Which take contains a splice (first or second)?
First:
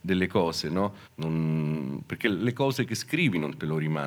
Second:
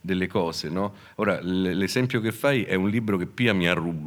first